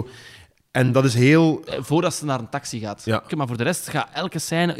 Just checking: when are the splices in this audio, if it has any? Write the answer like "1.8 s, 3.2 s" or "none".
1.7 s, 3.3 s